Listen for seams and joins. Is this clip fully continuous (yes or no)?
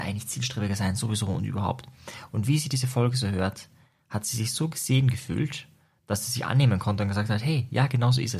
yes